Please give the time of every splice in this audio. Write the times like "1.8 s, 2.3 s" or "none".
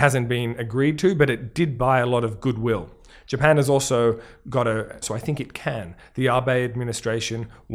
5.0 s